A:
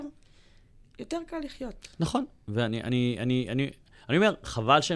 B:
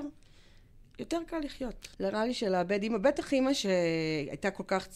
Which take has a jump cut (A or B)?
B